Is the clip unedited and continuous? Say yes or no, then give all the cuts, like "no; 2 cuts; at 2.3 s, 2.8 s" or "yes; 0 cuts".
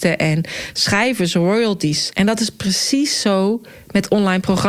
no; 1 cut; at 2.1 s